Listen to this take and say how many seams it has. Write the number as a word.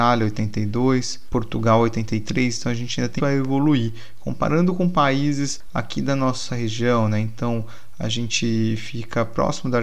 one